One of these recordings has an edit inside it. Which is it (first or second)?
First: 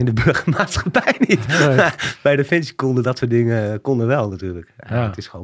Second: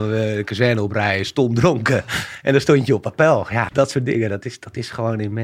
second